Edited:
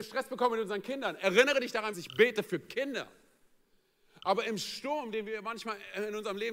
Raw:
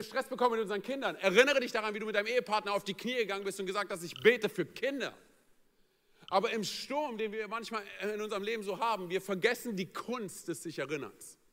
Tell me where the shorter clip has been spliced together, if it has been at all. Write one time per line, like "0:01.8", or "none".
0:01.9